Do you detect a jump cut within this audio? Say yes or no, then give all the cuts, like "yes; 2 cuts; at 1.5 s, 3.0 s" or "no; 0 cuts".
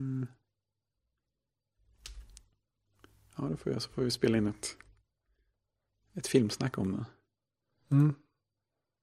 no; 0 cuts